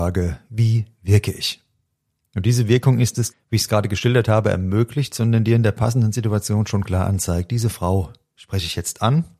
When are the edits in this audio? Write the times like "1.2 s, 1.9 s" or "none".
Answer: 3.3 s

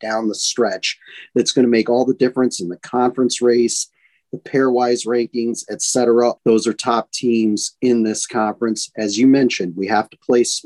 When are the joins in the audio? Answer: 6.4 s

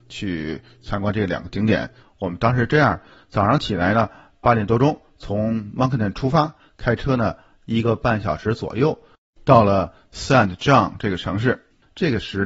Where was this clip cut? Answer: 2.0 s

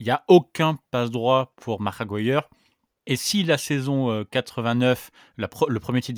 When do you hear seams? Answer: none

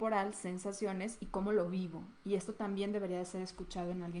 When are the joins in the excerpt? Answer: none

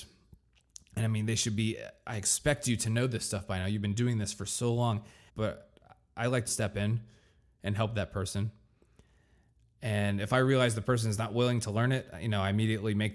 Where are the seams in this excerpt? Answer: 5.3 s, 6.5 s

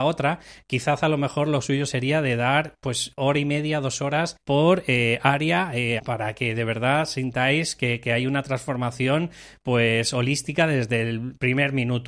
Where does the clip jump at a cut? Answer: 4.4 s, 6.0 s

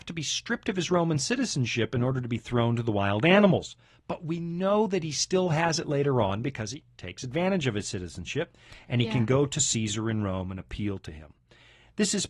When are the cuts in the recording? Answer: none

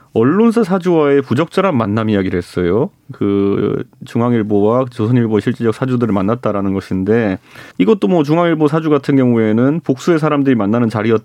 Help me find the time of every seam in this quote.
7.7 s

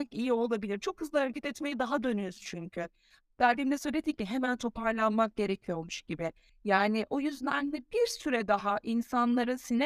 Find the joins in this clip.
6.5 s

